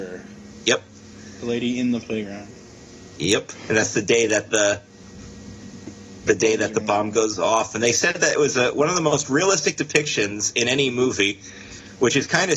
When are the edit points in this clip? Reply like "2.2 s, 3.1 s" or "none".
none